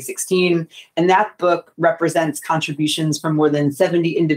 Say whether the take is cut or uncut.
uncut